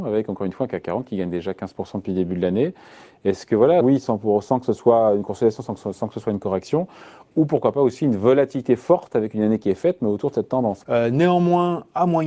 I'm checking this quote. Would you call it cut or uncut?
cut